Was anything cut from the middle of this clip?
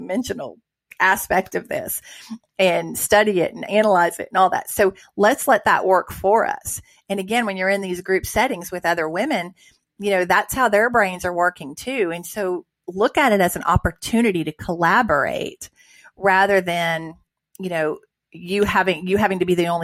no; 0 cuts

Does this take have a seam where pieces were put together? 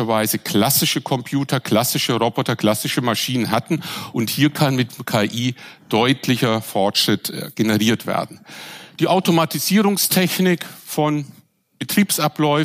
no; 0 cuts

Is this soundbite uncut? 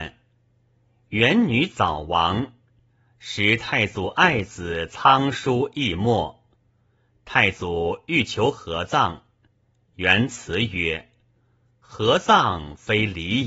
yes; 0 cuts

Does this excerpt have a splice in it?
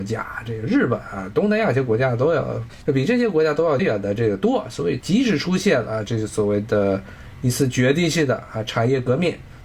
yes; 1 cut; at 3.8 s

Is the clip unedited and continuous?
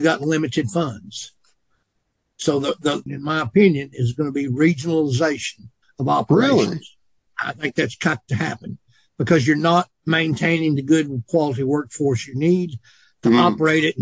no; 2 cuts; at 3.1 s, 7.3 s

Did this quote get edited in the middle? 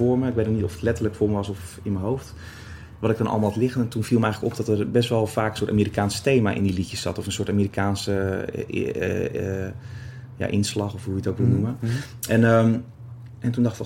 no; 0 cuts

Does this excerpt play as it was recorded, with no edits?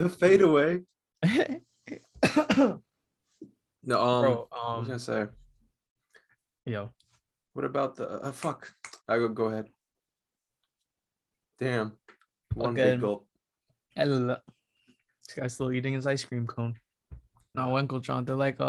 no; 2 cuts; at 9.0 s, 17.5 s

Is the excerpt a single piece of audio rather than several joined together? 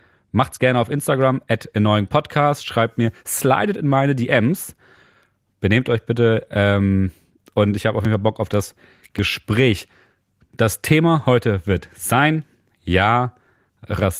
yes; 0 cuts

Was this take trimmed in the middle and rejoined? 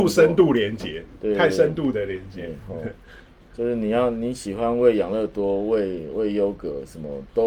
no; 0 cuts

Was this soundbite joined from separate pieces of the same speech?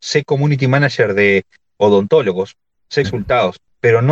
yes; 1 cut; at 3.0 s

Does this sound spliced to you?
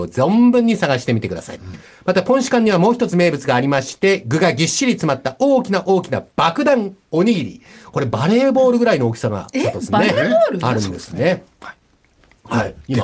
no; 0 cuts

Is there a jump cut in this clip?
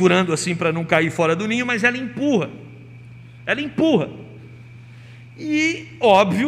no; 0 cuts

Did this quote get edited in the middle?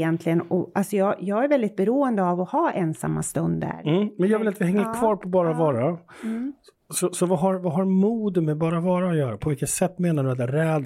no; 0 cuts

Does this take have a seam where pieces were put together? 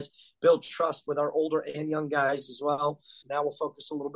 yes; 1 cut; at 3.2 s

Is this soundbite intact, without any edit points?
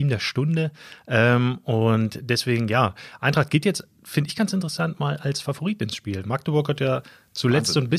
yes; 0 cuts

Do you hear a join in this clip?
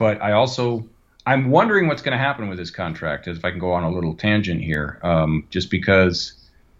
no; 0 cuts

